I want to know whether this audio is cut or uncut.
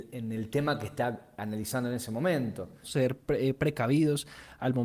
cut